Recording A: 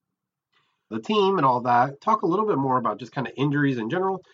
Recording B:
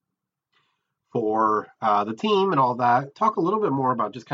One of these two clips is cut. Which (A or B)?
A